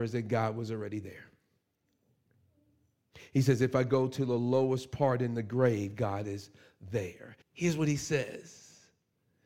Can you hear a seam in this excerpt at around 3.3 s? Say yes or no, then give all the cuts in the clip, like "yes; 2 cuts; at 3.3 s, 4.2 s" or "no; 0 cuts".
no; 1 cut; at 7.4 s